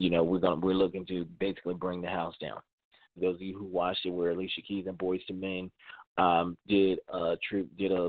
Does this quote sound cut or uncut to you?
cut